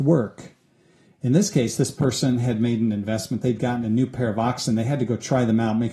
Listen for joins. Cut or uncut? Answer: uncut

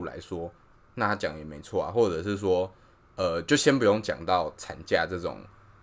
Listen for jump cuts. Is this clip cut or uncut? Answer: uncut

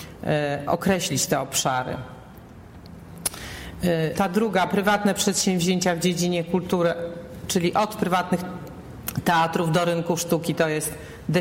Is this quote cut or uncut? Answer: cut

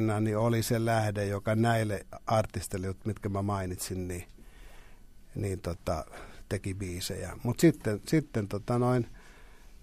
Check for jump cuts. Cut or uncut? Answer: uncut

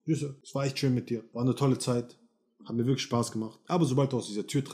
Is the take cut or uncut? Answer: uncut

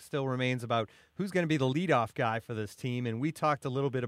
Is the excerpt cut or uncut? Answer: uncut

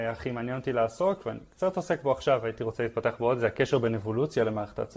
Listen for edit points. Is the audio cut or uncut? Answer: uncut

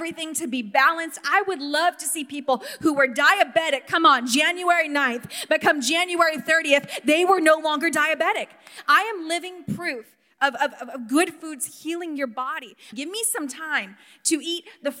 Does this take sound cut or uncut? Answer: cut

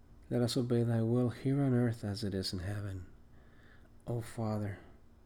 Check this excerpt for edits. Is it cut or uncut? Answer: uncut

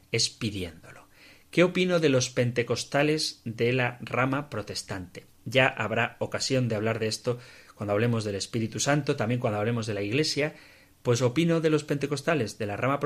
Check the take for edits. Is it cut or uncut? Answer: uncut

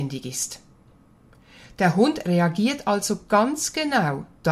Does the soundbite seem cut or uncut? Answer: uncut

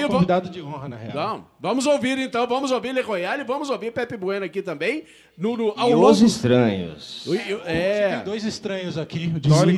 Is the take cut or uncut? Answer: uncut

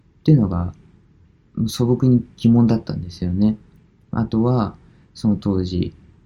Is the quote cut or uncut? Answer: cut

